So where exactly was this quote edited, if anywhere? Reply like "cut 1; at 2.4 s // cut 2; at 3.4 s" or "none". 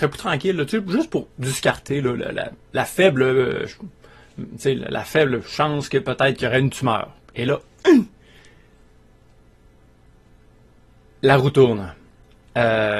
none

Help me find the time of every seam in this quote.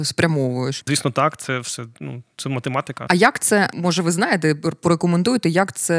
none

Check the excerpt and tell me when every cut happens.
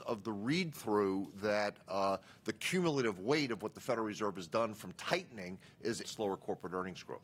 cut 1; at 6.0 s

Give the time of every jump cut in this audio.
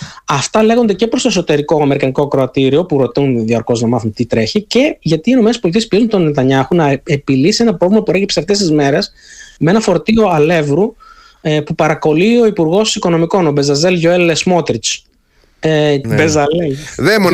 cut 1; at 16.0 s

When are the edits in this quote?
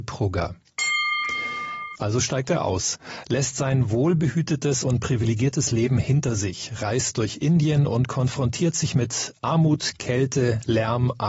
cut 1; at 1.9 s

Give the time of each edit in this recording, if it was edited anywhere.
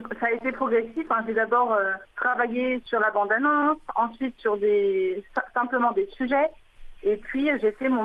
cut 1; at 2.1 s

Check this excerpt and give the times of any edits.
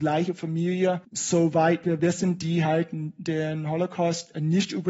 none

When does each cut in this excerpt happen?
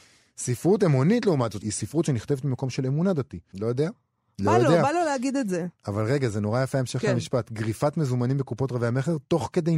cut 1; at 1.6 s // cut 2; at 3.5 s

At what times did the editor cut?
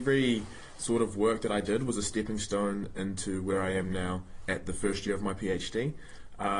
none

